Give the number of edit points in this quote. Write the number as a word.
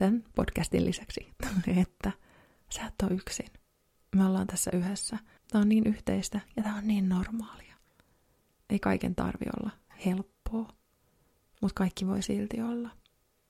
one